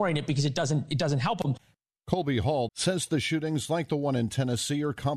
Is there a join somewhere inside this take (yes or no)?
yes